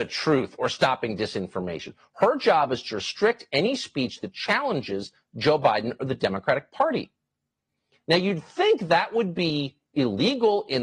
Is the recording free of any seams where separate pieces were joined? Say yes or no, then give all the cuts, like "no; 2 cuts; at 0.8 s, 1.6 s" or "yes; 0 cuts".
yes; 0 cuts